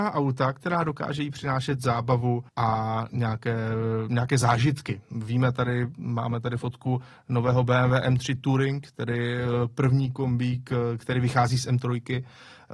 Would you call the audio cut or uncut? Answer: cut